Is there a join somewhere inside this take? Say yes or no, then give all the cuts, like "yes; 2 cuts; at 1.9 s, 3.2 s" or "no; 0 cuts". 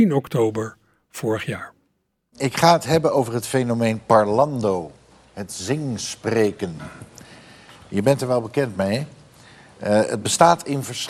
no; 0 cuts